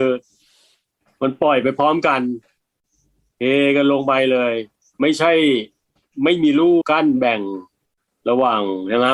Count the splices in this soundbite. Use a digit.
1